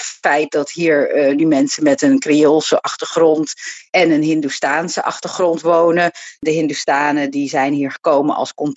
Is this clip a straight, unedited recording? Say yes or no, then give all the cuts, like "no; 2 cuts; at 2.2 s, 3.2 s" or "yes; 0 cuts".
yes; 0 cuts